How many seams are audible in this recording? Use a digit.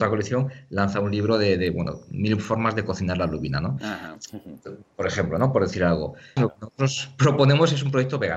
1